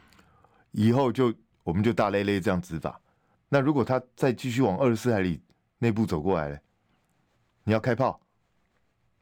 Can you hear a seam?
yes; 1 cut; at 3.3 s

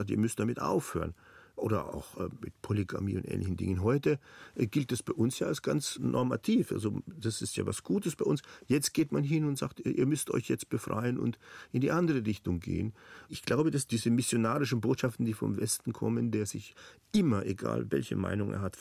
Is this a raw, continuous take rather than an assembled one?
yes; 0 cuts

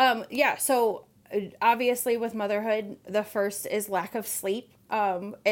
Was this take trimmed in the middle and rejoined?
no; 0 cuts

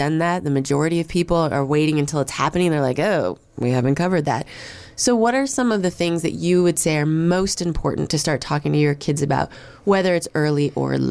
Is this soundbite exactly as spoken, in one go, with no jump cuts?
yes; 0 cuts

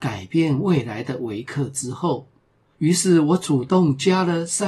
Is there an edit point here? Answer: yes; 1 cut; at 2.7 s

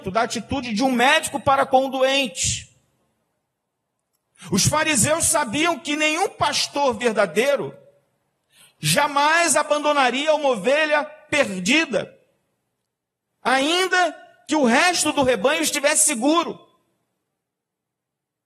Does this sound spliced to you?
no; 0 cuts

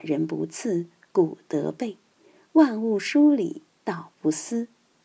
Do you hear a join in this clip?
no; 0 cuts

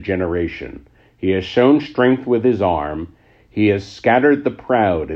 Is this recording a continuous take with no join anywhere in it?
yes; 0 cuts

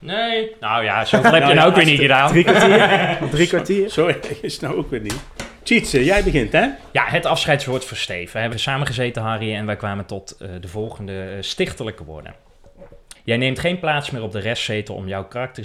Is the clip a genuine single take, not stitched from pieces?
no; 2 cuts; at 8.5 s, 13.1 s

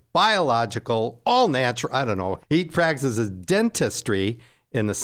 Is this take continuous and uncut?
no; 1 cut; at 2.4 s

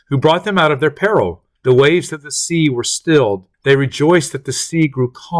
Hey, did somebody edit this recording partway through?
yes; 2 cuts; at 1.6 s, 3.5 s

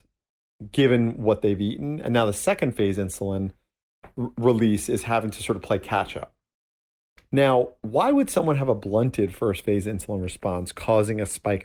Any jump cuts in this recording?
yes; 1 cut; at 4.3 s

